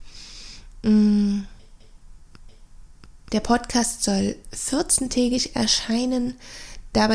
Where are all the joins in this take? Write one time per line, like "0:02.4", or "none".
none